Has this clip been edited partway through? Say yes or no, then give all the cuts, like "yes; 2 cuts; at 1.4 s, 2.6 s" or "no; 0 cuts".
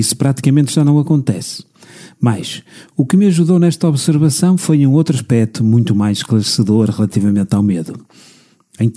no; 0 cuts